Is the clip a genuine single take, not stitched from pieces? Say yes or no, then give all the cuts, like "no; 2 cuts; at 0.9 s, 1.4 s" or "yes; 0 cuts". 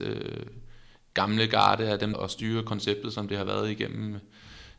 no; 1 cut; at 2.1 s